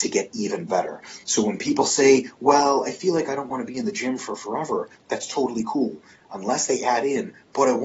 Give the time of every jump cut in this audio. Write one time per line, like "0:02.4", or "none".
none